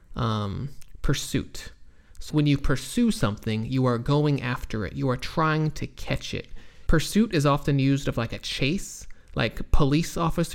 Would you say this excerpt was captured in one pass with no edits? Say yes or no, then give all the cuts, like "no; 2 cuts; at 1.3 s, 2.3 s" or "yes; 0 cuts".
no; 2 cuts; at 2.3 s, 6.9 s